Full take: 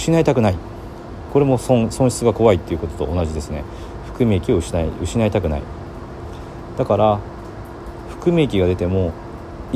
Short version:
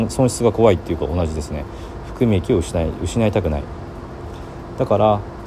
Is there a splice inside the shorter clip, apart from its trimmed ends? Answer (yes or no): yes